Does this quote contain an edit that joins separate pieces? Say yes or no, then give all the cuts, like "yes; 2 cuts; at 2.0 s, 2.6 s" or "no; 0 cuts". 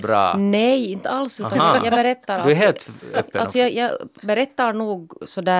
no; 0 cuts